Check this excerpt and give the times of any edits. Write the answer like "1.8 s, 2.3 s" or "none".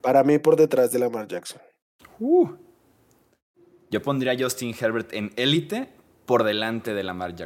none